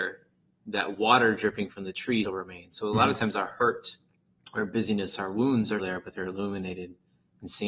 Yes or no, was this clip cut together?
yes